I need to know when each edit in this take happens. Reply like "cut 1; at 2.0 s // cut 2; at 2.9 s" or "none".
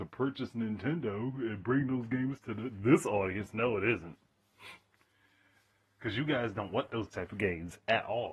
none